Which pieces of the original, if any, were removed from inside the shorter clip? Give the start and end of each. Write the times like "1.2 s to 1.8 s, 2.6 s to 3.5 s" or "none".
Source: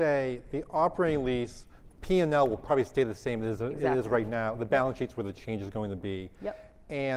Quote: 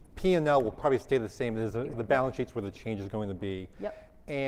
3.8 s to 4.5 s